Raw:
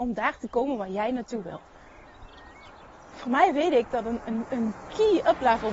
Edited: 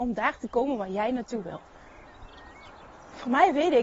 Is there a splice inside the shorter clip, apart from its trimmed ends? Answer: no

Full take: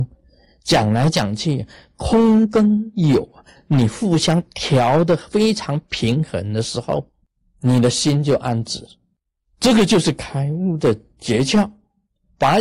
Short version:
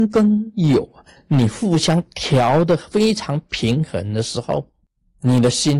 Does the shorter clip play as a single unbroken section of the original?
yes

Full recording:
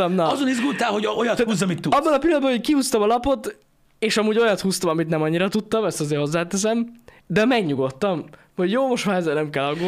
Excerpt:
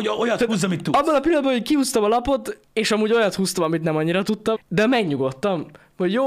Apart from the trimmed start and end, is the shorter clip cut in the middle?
yes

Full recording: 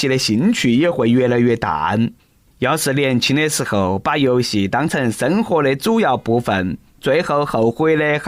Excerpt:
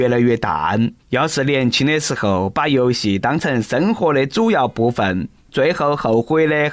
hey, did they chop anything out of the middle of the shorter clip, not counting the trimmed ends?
yes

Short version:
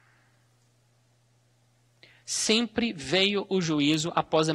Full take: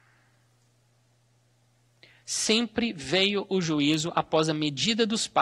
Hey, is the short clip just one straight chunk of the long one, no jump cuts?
yes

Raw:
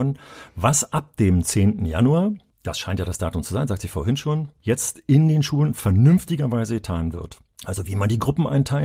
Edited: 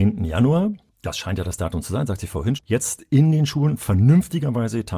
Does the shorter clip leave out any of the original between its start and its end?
yes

